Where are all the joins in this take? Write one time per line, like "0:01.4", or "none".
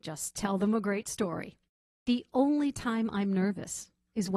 0:01.9